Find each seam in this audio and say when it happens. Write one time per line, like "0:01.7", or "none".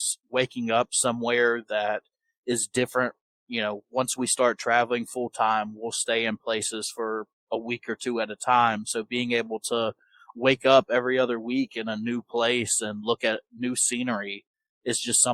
none